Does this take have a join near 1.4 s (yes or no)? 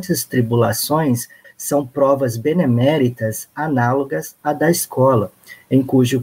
yes